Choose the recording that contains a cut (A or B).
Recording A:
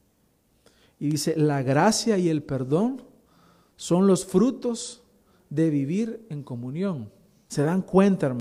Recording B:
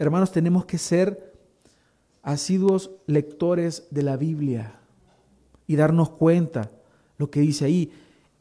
A